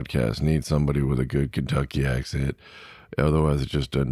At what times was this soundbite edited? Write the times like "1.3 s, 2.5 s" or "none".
none